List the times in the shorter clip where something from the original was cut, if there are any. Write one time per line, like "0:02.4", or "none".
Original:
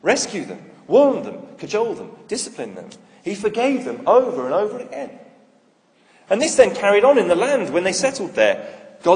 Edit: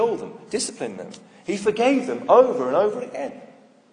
none